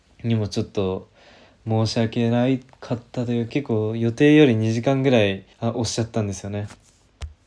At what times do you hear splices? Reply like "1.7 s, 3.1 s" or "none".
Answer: 3.5 s, 5.5 s